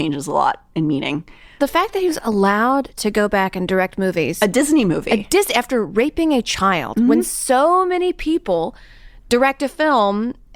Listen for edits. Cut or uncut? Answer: uncut